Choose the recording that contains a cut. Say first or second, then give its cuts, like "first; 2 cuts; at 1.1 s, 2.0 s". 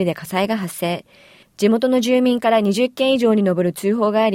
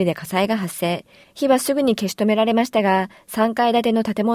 second; 1 cut; at 1.2 s